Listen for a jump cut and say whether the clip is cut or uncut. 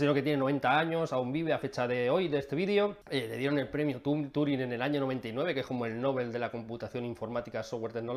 cut